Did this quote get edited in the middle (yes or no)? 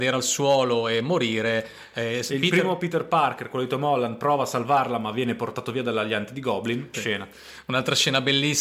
yes